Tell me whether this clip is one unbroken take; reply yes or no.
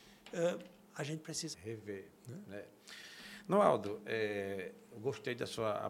no